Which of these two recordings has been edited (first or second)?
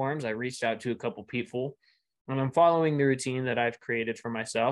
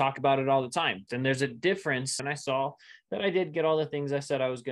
second